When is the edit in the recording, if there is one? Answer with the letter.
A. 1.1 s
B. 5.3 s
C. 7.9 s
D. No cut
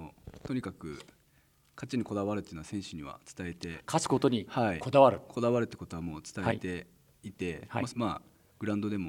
C